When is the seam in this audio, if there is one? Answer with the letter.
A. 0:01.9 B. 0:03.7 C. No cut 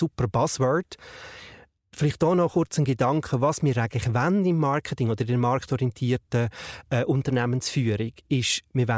C